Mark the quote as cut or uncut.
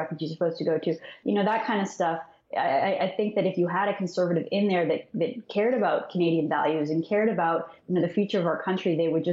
uncut